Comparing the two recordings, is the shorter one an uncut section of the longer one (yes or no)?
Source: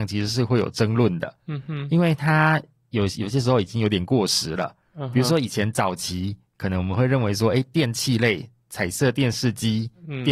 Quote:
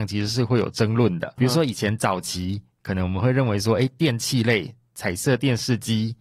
no